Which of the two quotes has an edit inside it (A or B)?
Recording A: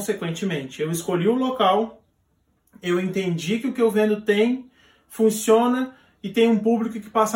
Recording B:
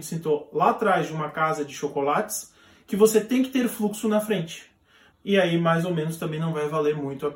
B